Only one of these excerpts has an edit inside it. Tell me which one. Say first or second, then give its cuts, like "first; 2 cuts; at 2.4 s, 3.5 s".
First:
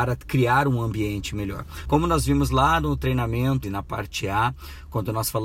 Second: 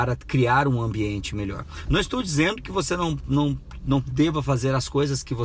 first; 2 cuts; at 1.9 s, 3.6 s